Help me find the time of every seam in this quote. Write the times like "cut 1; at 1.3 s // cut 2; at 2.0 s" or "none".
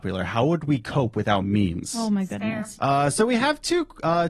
cut 1; at 2.7 s